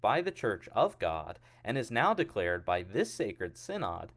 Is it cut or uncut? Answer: uncut